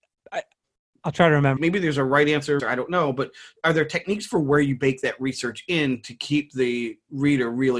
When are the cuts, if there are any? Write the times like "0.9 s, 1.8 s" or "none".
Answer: 1.6 s, 2.6 s